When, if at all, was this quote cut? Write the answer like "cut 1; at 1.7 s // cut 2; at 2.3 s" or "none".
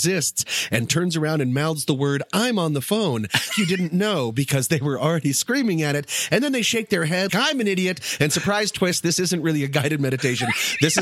cut 1; at 3.5 s // cut 2; at 7.3 s